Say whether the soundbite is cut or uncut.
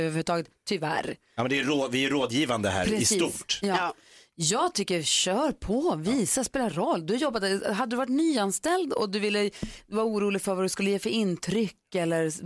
uncut